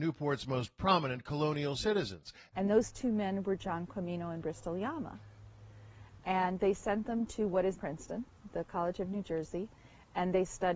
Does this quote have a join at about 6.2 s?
no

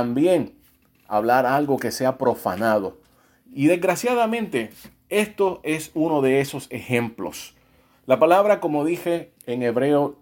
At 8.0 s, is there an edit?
no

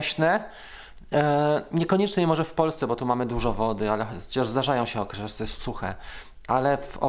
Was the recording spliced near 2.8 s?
no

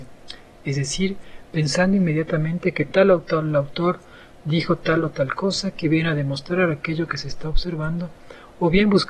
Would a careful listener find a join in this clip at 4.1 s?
no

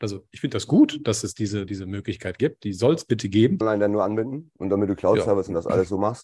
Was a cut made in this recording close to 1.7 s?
yes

